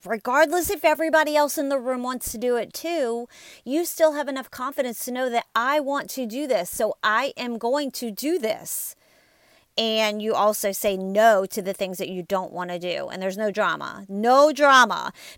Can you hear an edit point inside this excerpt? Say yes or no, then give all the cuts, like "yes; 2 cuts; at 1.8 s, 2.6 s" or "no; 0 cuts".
no; 0 cuts